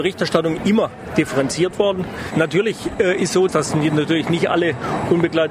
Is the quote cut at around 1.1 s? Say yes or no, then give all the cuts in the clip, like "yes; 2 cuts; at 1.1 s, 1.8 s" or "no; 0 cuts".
no; 2 cuts; at 2.3 s, 3.5 s